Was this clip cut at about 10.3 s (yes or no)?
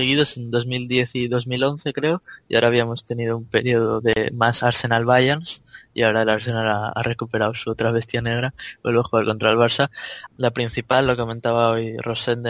yes